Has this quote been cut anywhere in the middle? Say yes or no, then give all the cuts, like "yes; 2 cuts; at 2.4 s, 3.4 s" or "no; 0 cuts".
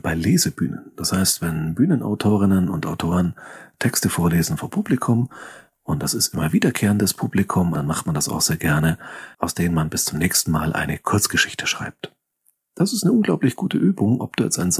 yes; 2 cuts; at 7.7 s, 9.3 s